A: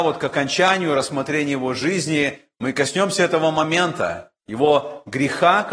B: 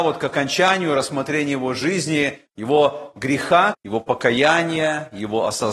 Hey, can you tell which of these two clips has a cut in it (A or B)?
B